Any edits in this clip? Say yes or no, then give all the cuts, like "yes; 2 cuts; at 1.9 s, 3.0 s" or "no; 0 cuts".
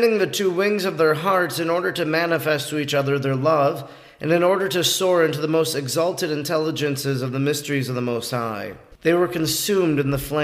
yes; 1 cut; at 8.9 s